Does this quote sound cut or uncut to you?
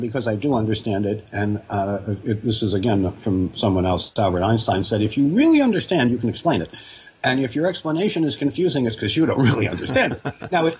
uncut